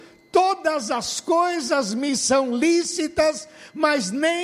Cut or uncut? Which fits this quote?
uncut